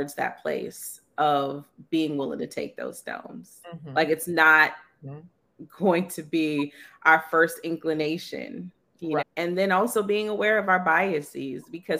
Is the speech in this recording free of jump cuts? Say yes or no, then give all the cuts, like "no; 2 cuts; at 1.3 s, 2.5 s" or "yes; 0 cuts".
no; 1 cut; at 9.2 s